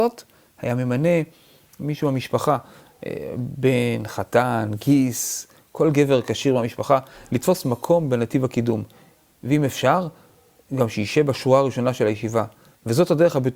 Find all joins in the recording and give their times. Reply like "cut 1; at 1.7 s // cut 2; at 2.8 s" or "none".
none